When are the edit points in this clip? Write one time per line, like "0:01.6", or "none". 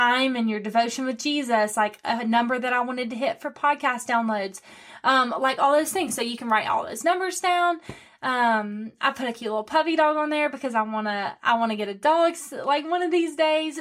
none